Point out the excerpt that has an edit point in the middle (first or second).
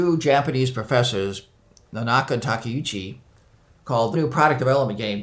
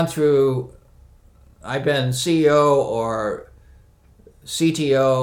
first